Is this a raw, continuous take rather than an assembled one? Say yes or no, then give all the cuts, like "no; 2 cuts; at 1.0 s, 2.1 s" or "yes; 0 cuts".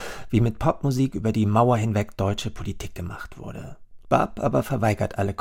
no; 1 cut; at 4.0 s